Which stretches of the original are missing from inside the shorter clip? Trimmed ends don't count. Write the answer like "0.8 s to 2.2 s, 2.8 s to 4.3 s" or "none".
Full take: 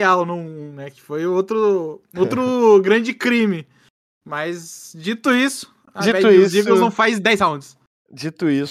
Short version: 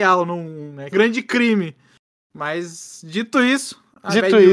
0.9 s to 2.8 s